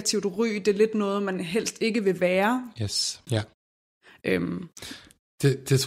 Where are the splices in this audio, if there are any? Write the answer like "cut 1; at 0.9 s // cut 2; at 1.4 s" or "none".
cut 1; at 3.3 s